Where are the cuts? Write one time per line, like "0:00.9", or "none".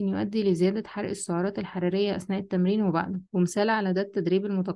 0:03.3